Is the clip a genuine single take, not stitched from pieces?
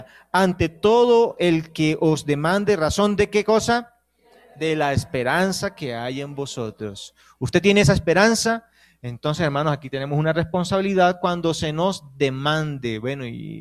yes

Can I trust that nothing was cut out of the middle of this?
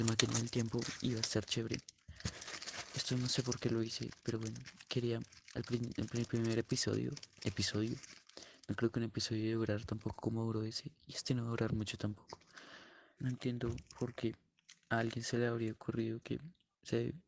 no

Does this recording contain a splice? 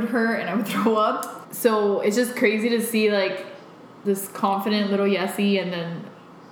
yes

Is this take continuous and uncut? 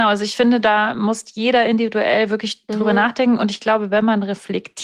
yes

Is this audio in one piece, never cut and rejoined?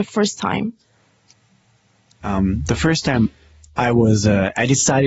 yes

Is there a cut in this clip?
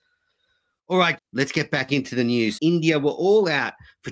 yes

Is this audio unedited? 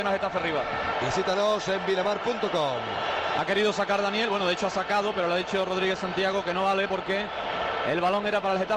no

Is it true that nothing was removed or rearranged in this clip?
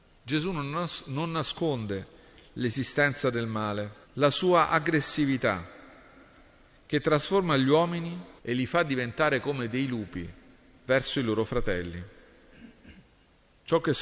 no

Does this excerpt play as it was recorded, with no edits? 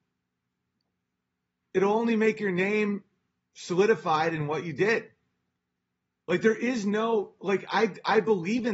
yes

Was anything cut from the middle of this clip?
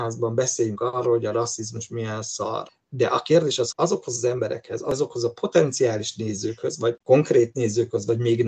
yes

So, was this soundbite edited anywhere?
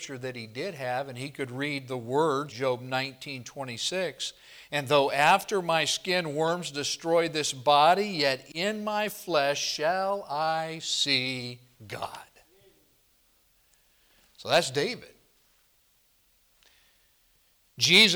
yes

